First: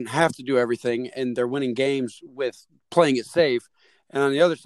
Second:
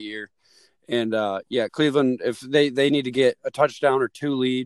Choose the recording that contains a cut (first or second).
second